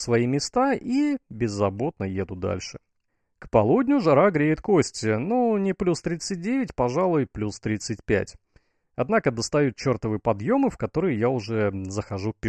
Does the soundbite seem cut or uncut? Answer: uncut